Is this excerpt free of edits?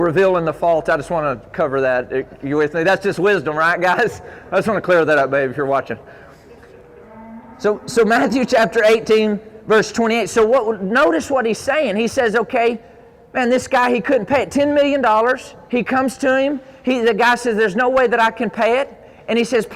yes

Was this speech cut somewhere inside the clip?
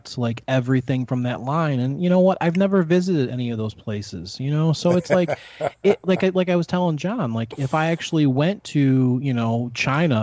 no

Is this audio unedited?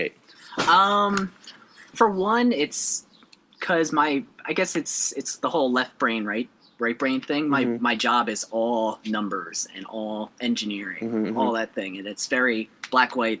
yes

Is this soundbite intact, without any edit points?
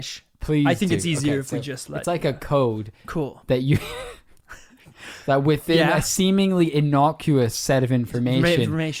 yes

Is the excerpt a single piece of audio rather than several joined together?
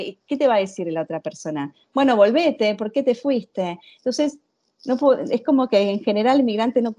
yes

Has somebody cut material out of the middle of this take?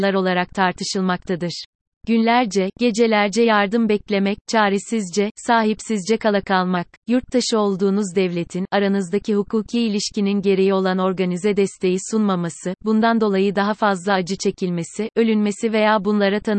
yes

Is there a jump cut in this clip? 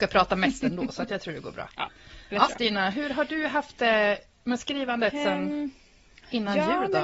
yes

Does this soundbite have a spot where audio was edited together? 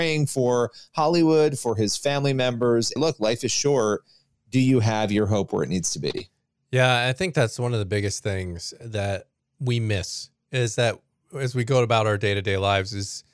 yes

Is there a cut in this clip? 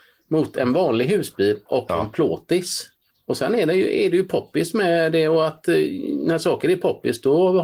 yes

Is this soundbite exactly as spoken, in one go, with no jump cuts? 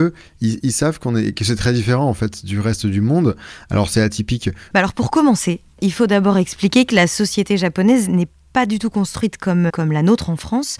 no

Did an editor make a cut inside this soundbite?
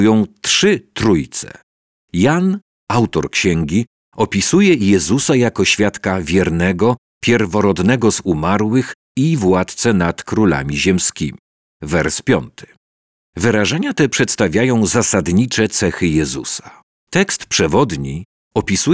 yes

